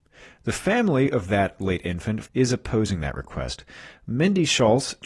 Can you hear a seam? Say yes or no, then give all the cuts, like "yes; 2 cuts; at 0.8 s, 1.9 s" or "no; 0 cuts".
yes; 1 cut; at 2.3 s